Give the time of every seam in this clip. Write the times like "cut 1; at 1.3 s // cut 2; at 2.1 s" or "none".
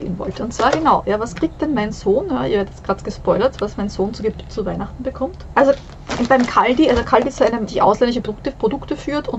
cut 1; at 5.5 s // cut 2; at 7.7 s